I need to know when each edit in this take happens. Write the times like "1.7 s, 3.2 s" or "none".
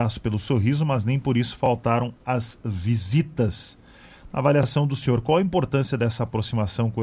none